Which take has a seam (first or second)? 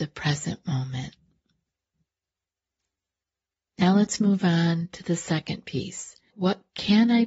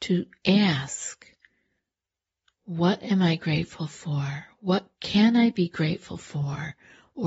first